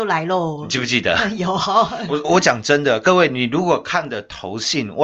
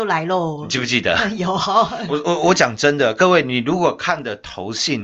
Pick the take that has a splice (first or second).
first